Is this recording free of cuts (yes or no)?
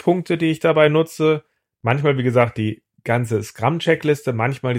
yes